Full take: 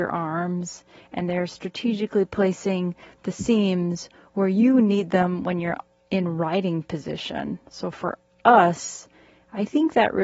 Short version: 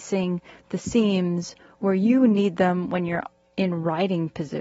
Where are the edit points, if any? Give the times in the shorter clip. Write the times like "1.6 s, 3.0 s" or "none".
none